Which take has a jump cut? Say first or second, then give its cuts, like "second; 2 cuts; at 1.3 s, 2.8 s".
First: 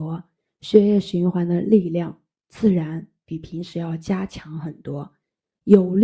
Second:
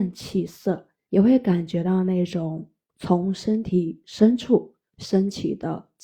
second; 1 cut; at 1.1 s